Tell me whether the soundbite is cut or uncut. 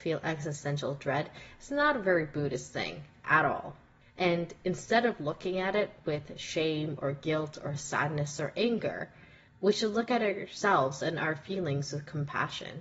cut